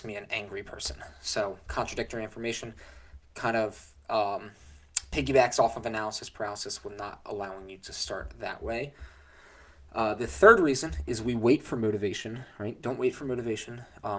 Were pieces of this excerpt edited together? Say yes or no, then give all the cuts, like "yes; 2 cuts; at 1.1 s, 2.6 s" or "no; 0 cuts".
no; 0 cuts